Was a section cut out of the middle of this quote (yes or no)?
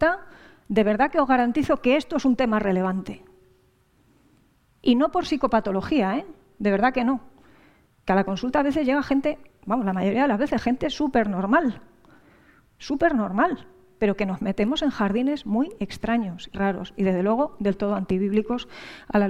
yes